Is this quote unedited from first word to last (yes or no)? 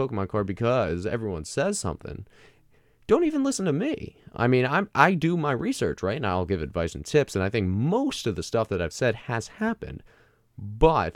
yes